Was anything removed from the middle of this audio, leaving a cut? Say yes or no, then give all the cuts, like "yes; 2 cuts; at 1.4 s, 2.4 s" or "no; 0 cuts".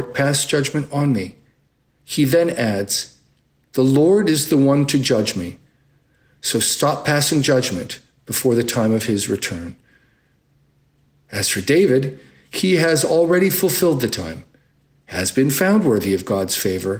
yes; 1 cut; at 2.0 s